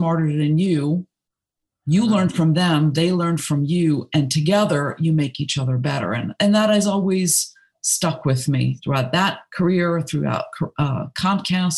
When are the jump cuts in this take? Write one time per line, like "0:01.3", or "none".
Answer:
none